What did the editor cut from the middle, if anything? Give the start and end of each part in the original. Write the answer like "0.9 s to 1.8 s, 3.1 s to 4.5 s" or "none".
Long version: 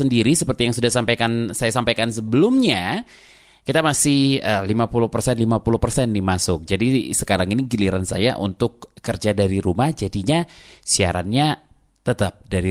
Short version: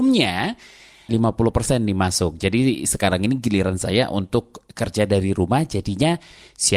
3.6 s to 5.4 s